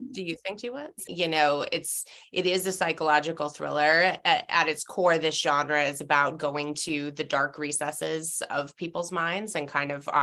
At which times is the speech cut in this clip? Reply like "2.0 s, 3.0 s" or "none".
1.1 s